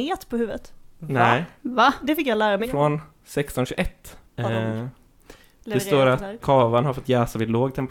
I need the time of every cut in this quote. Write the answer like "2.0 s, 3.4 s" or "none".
2.6 s, 4.3 s, 6.4 s